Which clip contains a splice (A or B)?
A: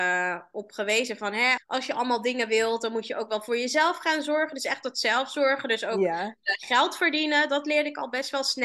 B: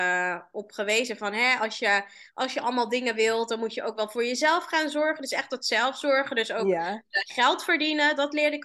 A